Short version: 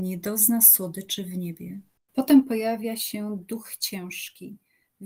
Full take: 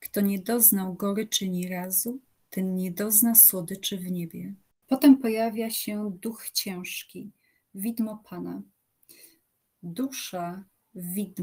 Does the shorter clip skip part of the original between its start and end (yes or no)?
no